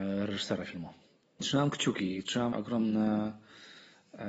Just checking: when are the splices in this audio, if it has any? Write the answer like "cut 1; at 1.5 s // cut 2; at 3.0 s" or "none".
cut 1; at 1.4 s // cut 2; at 2.5 s